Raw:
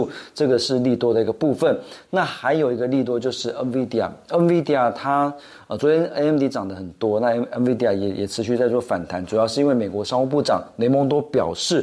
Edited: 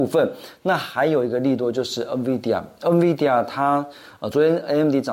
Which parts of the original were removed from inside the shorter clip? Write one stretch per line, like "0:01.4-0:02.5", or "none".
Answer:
none